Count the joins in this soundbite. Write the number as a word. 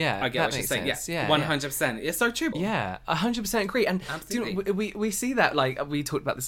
one